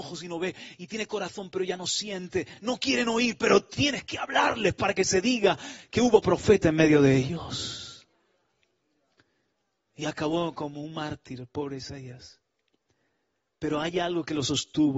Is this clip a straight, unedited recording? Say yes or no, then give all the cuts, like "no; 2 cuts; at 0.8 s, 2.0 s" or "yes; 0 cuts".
yes; 0 cuts